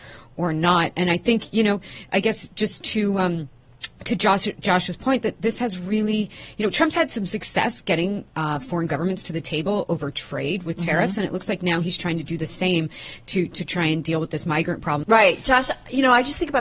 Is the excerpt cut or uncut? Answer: cut